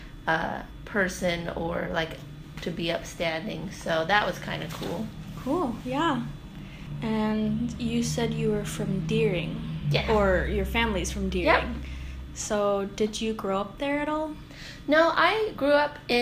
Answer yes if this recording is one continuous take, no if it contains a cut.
yes